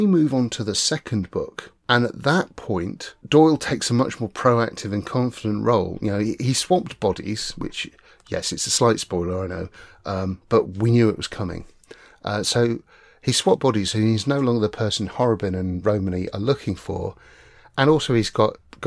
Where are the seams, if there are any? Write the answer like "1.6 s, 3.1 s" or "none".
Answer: none